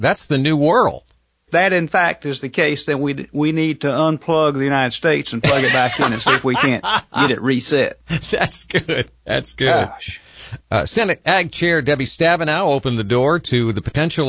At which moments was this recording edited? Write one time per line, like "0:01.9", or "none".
none